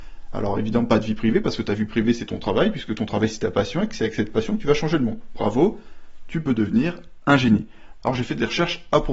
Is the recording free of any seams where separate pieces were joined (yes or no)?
no